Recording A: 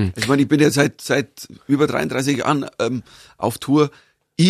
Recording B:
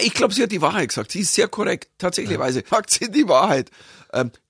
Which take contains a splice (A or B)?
B